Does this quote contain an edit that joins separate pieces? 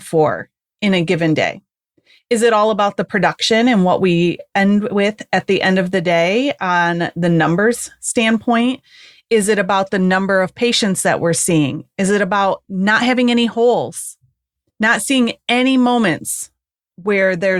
no; 0 cuts

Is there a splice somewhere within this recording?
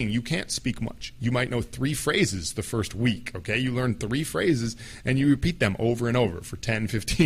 no; 0 cuts

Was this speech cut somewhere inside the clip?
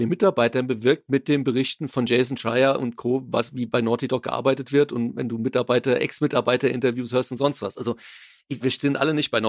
yes; 2 cuts; at 1.9 s, 8.6 s

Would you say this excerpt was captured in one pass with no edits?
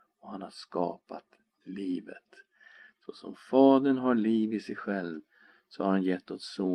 yes; 0 cuts

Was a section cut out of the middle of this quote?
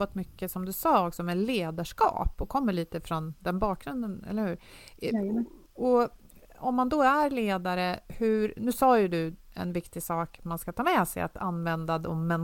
no; 0 cuts

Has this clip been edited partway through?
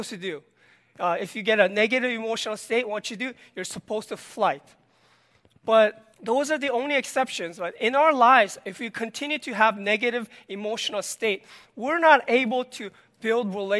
yes; 1 cut; at 6.1 s

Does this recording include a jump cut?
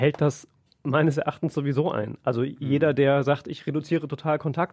no; 0 cuts

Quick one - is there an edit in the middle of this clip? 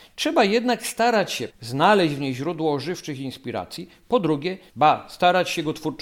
yes; 2 cuts; at 1.5 s, 4.7 s

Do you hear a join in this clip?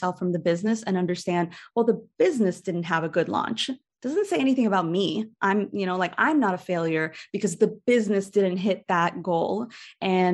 no; 0 cuts

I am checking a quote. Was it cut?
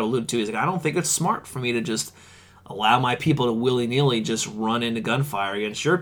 no; 0 cuts

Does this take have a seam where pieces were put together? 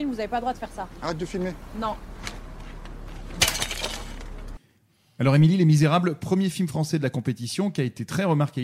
no; 0 cuts

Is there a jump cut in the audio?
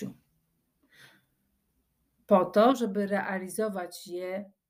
no; 0 cuts

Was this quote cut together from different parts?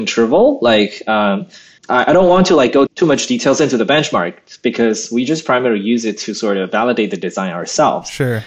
yes; 2 cuts; at 1.8 s, 2.9 s

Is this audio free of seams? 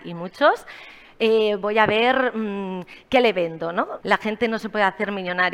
no; 1 cut; at 4.0 s

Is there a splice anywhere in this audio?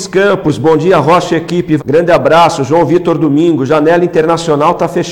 yes; 1 cut; at 1.8 s

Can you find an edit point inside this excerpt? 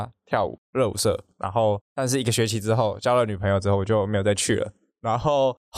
no; 0 cuts

